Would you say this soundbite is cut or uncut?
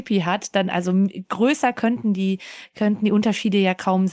uncut